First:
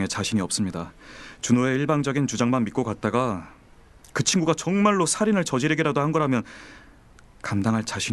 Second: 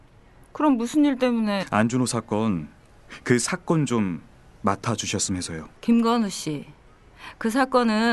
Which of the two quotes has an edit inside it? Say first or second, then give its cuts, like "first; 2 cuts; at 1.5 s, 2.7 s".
second; 1 cut; at 5.8 s